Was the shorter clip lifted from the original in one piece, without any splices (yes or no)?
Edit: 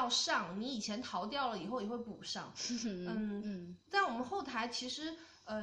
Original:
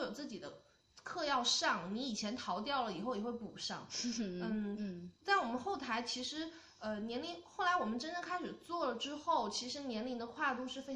yes